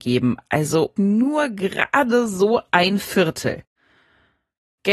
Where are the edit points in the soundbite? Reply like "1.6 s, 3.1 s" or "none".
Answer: 1.0 s